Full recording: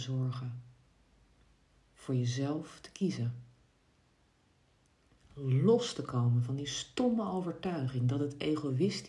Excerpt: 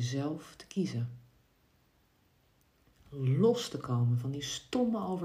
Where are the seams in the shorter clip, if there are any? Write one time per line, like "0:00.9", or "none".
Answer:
none